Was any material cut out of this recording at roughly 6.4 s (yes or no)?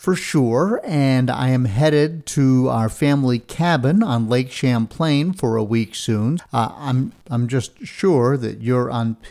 yes